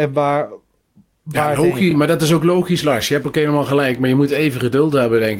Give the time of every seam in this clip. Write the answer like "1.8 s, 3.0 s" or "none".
none